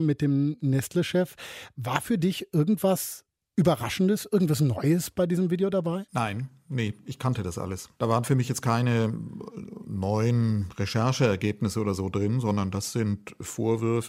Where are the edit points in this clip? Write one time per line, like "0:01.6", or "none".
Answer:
0:07.9